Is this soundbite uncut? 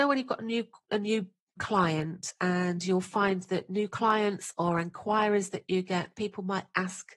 no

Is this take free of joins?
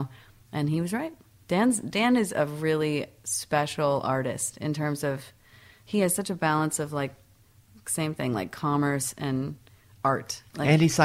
yes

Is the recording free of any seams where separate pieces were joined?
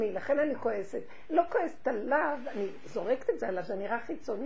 yes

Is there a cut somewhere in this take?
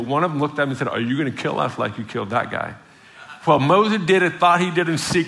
no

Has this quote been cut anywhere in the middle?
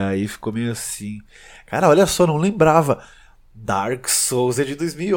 no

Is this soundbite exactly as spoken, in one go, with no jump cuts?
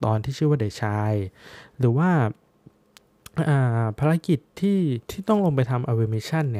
no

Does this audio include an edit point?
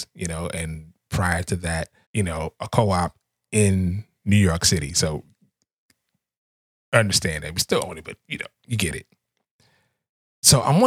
yes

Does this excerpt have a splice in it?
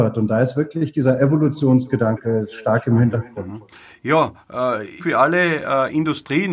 yes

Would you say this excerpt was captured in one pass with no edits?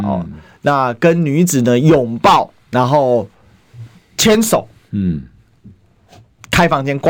no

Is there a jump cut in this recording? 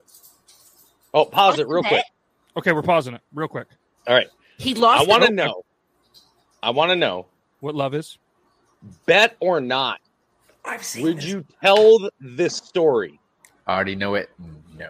no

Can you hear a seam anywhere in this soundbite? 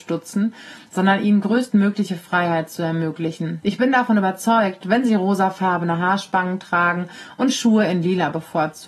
yes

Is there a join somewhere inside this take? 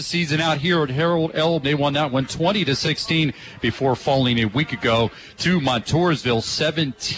yes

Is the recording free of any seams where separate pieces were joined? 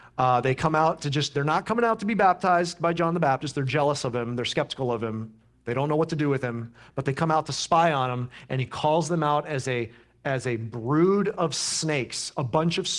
yes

